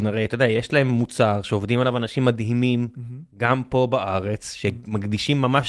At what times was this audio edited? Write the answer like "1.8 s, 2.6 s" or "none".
none